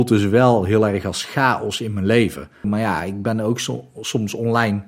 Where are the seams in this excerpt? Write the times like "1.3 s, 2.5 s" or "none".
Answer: 2.6 s